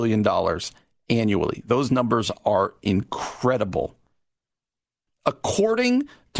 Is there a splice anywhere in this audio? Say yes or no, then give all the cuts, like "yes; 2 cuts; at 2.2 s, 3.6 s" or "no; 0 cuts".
yes; 1 cut; at 5.1 s